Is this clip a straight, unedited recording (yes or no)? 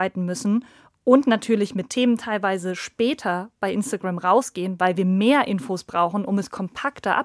yes